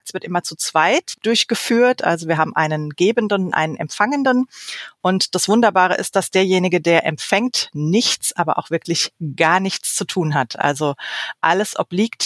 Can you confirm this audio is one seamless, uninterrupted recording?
yes; 0 cuts

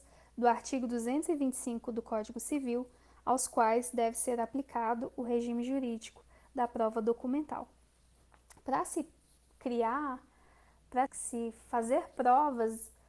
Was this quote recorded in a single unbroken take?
no; 1 cut; at 11.1 s

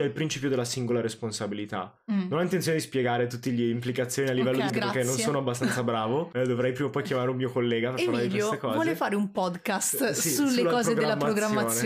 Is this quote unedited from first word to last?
no; 1 cut; at 4.7 s

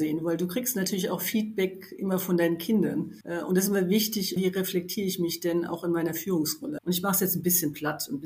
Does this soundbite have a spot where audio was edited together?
yes; 3 cuts; at 3.2 s, 4.4 s, 6.8 s

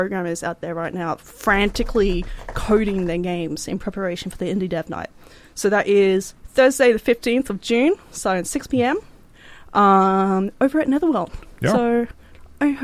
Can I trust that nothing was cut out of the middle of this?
yes; 0 cuts

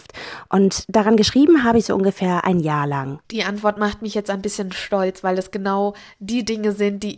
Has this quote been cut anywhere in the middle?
yes; 1 cut; at 3.2 s

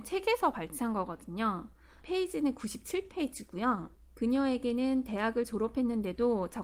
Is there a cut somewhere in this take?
yes; 1 cut; at 2.0 s

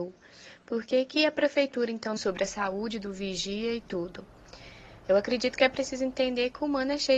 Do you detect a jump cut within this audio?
yes; 1 cut; at 2.2 s

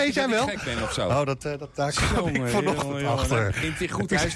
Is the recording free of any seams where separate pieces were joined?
yes; 0 cuts

